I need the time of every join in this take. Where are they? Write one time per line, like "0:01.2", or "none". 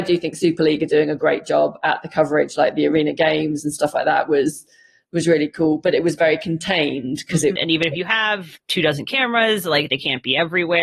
0:07.6

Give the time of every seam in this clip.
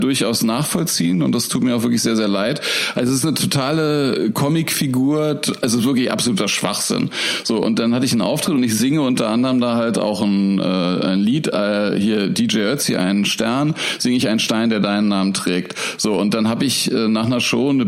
0:02.9

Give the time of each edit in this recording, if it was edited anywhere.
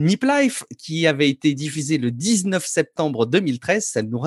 none

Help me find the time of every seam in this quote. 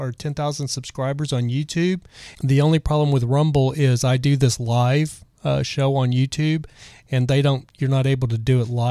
0:02.3

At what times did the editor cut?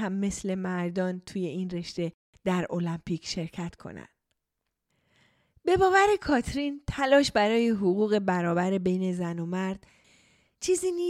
none

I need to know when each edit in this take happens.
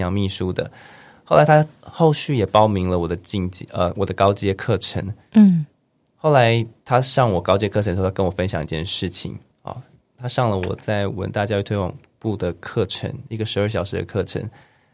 0:10.0

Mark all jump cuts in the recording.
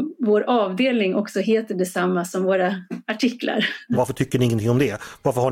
0:03.9

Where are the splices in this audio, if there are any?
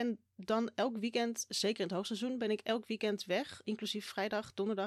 0:03.6

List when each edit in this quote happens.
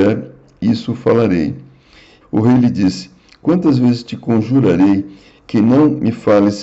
0:02.2

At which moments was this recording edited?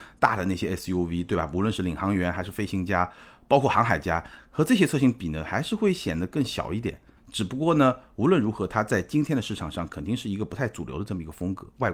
0:07.2

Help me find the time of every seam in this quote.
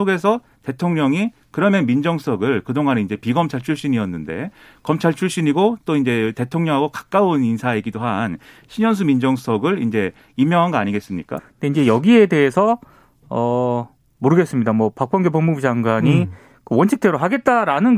0:11.4

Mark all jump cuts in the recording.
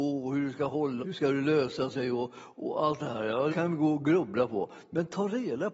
0:01.0
0:03.5

